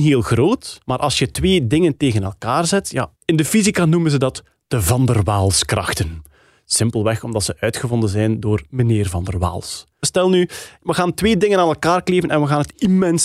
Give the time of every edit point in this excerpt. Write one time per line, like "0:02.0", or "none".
0:03.1
0:10.0